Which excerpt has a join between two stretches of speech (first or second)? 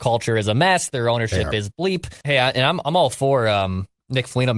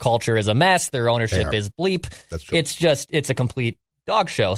first